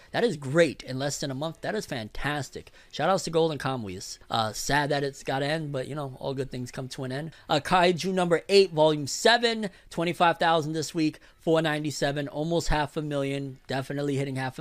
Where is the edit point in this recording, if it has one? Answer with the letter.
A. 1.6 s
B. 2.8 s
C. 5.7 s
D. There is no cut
D